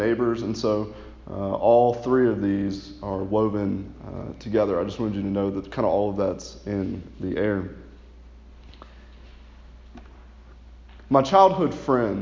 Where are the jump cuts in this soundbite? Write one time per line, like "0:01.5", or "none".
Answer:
none